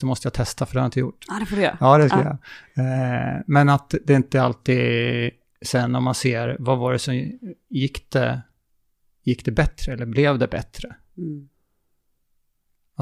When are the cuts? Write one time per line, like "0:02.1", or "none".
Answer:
none